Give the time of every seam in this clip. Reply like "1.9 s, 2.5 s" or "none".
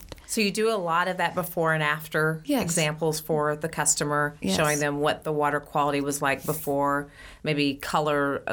none